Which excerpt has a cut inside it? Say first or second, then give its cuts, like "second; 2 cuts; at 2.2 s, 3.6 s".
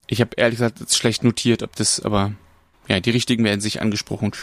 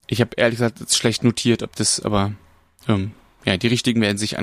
first; 1 cut; at 2.7 s